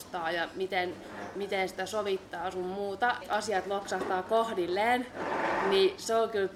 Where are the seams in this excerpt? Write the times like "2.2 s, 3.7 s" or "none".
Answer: 3.2 s